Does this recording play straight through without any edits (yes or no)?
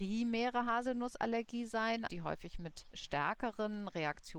no